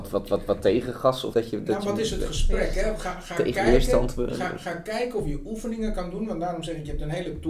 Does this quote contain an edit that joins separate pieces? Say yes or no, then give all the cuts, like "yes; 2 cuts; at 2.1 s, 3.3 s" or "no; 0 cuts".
yes; 1 cut; at 1.3 s